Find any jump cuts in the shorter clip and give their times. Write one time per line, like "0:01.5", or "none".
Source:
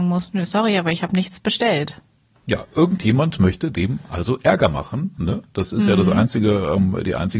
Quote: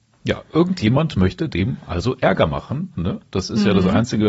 none